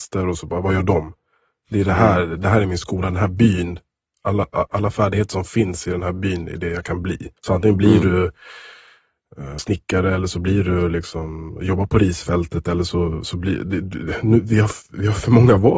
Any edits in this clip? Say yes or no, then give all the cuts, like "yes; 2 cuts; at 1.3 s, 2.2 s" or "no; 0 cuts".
yes; 3 cuts; at 4.7 s, 7.4 s, 9.6 s